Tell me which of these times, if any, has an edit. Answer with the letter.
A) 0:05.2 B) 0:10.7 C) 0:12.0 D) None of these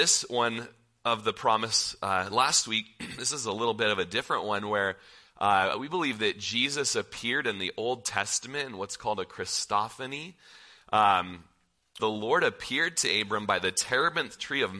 C